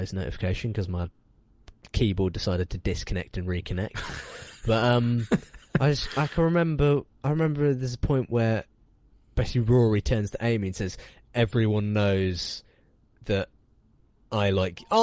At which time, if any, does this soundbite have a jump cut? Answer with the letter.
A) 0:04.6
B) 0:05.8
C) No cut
C